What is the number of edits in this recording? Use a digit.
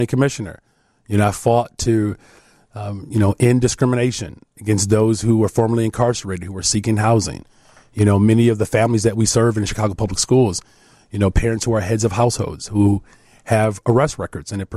0